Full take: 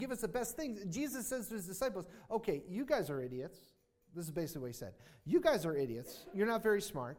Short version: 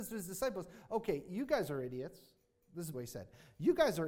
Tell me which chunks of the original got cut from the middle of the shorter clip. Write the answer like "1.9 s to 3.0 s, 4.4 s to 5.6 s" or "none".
4.3 s to 4.6 s